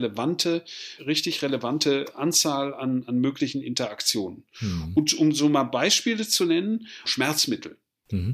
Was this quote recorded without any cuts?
no; 2 cuts; at 1.0 s, 7.0 s

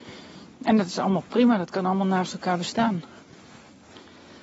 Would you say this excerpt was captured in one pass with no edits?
yes; 0 cuts

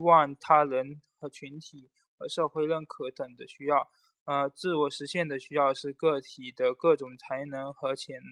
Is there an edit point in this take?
no; 0 cuts

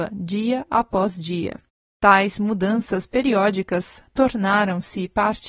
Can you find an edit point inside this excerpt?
no; 0 cuts

